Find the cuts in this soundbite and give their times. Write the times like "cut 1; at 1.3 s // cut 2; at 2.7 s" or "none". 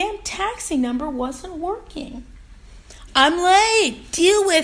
cut 1; at 3.1 s